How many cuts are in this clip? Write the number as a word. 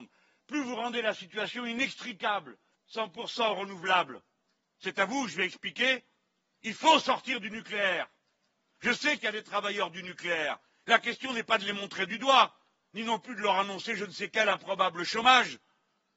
one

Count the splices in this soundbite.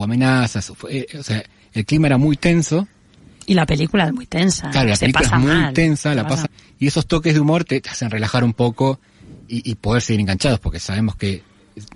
one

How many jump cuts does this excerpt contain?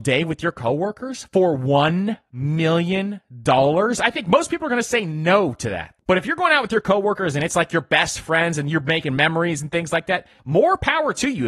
one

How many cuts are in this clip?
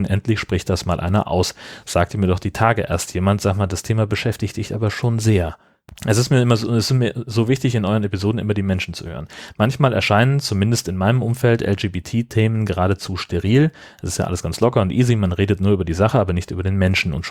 one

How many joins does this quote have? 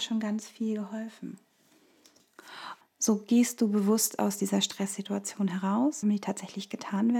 two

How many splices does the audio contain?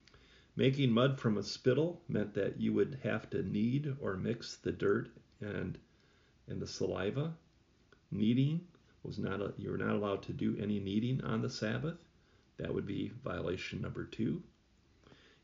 one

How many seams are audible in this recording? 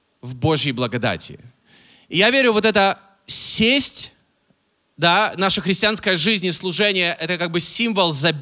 one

